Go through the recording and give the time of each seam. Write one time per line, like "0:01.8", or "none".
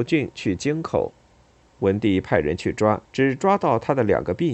0:01.7
0:03.0